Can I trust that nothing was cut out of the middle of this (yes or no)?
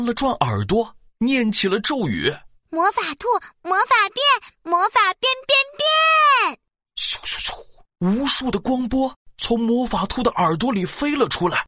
yes